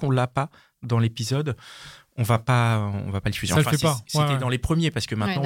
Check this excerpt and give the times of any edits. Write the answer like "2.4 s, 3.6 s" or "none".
none